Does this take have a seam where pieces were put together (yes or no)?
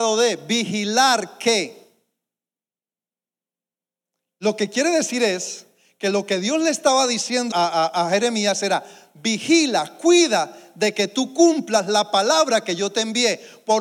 yes